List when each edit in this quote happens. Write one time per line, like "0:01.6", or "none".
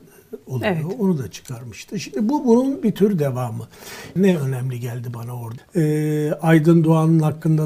0:04.2
0:05.6